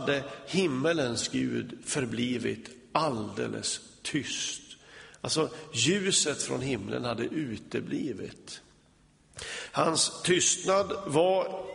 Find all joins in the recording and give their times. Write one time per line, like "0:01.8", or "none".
none